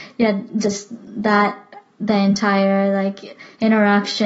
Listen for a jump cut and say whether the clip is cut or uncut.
uncut